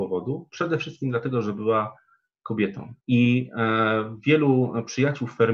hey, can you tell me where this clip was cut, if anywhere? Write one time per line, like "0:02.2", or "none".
0:03.0